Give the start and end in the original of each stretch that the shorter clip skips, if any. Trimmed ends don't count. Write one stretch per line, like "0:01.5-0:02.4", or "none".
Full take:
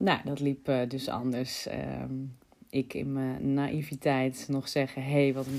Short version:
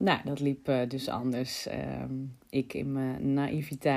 0:02.4-0:02.6